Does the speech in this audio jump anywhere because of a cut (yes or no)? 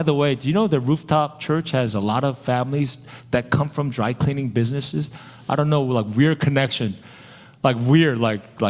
no